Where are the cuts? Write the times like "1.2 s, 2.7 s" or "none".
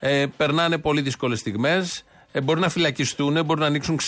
none